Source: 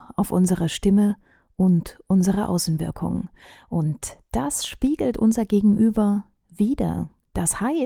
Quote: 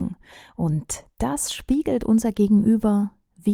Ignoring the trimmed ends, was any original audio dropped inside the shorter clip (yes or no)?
no